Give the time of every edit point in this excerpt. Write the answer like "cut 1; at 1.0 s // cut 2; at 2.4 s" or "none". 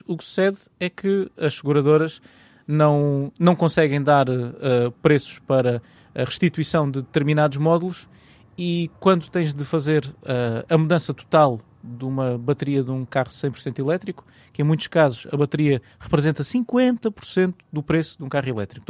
cut 1; at 17.6 s